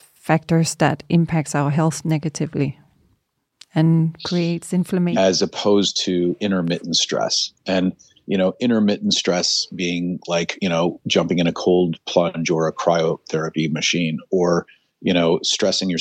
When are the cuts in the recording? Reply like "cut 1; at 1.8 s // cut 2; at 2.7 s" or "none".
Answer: cut 1; at 5.1 s